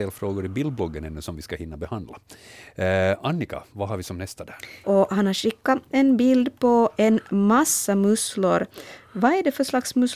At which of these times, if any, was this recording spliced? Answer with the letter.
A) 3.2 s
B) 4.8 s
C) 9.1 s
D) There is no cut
B